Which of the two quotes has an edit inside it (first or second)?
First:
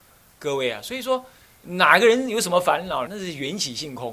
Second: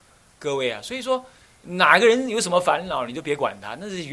first